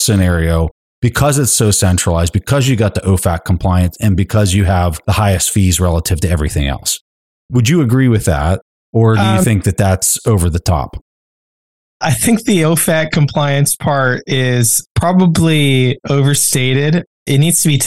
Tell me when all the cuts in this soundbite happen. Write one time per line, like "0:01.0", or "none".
none